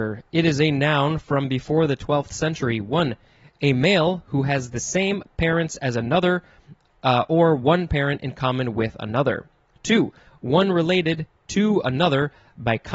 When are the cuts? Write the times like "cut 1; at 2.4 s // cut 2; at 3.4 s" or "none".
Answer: none